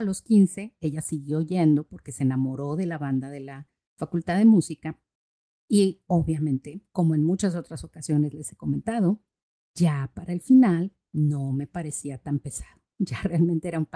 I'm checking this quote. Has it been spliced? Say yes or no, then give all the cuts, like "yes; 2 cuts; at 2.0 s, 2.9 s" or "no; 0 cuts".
yes; 1 cut; at 5.5 s